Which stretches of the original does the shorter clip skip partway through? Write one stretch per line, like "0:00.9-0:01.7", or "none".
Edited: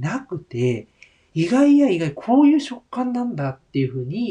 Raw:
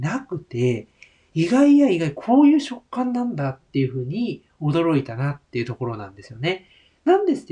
none